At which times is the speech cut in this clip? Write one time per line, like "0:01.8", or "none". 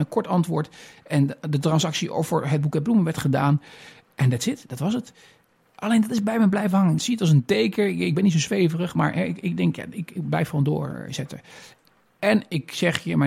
0:07.0